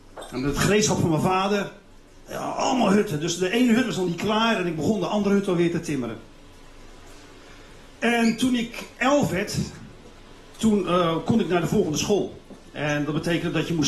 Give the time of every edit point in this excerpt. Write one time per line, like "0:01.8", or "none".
none